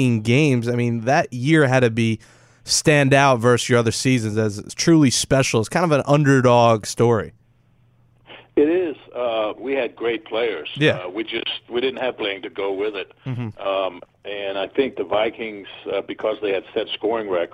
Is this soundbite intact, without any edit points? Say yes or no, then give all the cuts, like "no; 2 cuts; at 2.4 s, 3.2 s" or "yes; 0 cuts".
no; 2 cuts; at 9.6 s, 12.2 s